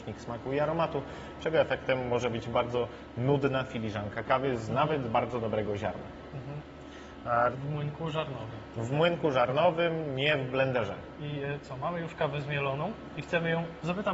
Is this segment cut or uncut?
cut